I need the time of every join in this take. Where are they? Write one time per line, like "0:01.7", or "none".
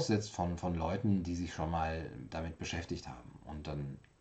none